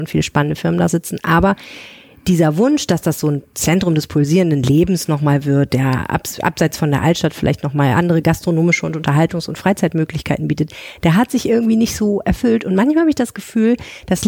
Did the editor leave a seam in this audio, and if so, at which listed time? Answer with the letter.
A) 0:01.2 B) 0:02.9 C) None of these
C